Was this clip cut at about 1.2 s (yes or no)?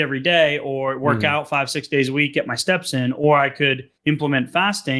no